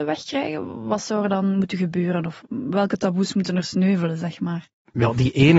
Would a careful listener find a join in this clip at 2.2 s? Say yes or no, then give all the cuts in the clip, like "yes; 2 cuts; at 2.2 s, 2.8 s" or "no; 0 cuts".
no; 0 cuts